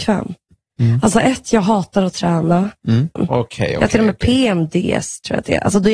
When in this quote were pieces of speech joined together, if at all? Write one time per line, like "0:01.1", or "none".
0:03.2